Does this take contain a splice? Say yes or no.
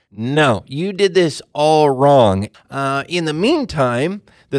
yes